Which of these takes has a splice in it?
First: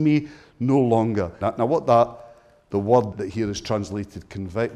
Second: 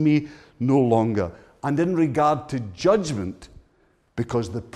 first; 2 cuts; at 1.4 s, 3.1 s

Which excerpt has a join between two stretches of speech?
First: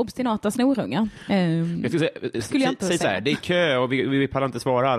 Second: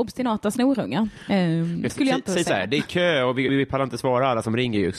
second; 2 cuts; at 1.9 s, 3.5 s

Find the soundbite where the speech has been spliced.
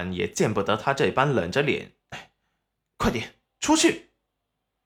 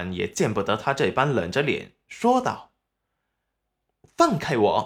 first; 1 cut; at 2.0 s

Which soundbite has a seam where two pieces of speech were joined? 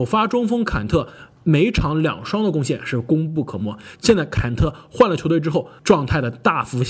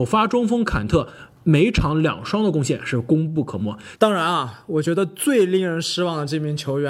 second; 1 cut; at 4.0 s

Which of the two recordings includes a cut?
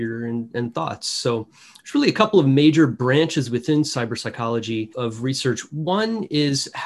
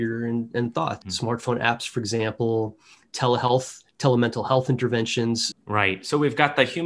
second; 2 cuts; at 1.0 s, 5.5 s

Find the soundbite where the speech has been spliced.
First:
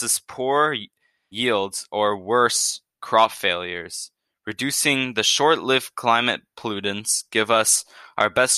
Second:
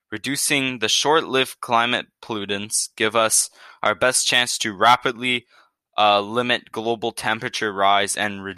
first; 1 cut; at 1.3 s

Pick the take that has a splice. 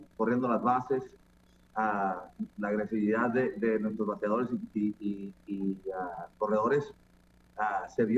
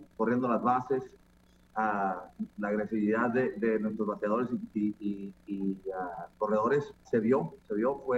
second; 1 cut; at 7.0 s

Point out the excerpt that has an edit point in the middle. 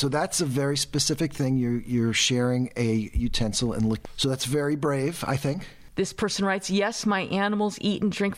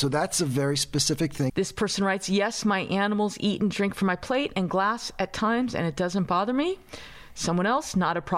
second; 1 cut; at 1.5 s

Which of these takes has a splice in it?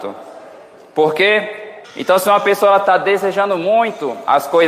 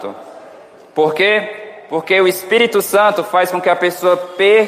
first; 1 cut; at 1.8 s

